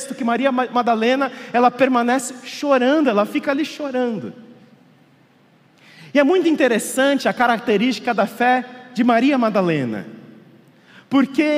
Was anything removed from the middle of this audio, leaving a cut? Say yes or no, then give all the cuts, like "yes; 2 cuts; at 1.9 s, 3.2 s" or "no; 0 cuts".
no; 0 cuts